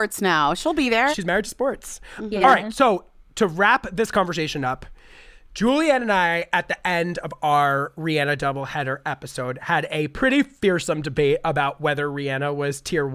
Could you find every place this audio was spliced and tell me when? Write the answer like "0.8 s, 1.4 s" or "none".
1.1 s